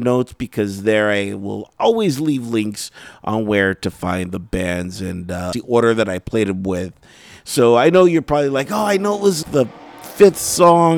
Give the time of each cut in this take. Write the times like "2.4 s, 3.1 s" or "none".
5.5 s, 9.4 s

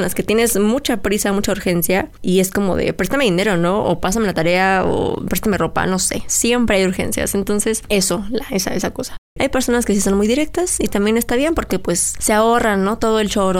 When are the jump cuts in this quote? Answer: 9.4 s

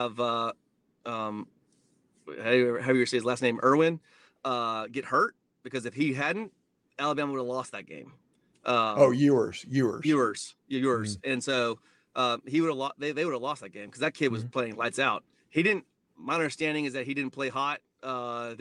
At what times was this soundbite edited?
none

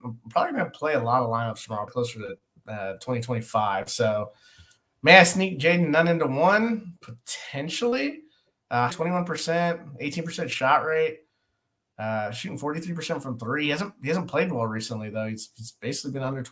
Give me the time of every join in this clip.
1.9 s, 8.9 s

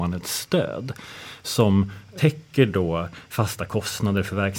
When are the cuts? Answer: none

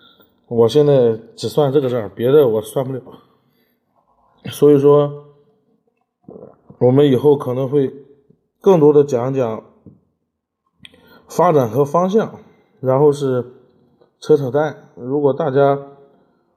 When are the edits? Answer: none

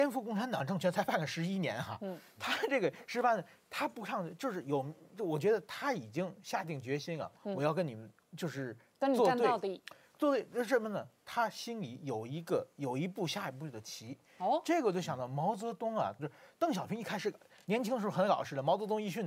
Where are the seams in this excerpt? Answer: 16.2 s

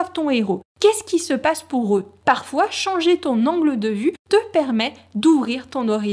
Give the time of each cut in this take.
2.2 s

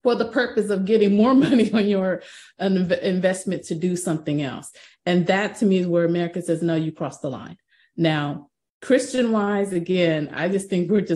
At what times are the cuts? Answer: none

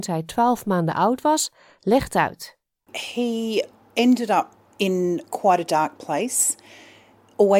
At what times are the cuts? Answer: none

